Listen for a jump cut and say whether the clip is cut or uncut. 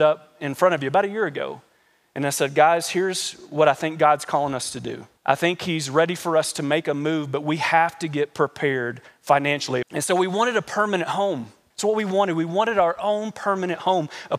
cut